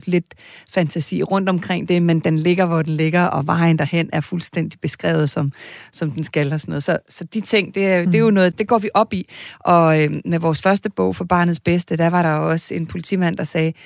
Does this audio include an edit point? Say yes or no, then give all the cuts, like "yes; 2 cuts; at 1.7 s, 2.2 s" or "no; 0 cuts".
yes; 1 cut; at 8.5 s